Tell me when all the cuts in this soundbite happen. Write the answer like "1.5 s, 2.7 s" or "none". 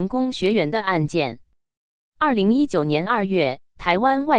2.1 s